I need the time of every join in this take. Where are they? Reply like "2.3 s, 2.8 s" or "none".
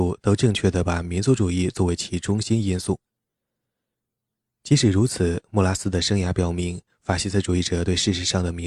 none